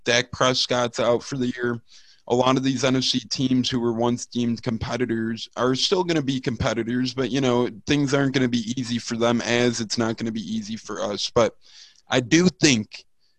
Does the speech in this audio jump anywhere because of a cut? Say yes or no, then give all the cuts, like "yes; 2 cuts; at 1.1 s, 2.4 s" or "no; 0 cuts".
no; 0 cuts